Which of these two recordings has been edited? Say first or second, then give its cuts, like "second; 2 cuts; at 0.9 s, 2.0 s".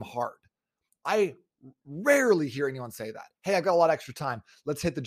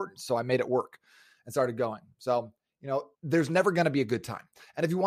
second; 1 cut; at 3.1 s